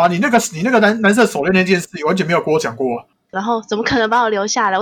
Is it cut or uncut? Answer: cut